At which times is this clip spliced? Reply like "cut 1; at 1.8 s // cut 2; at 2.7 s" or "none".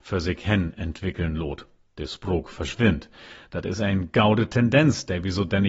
none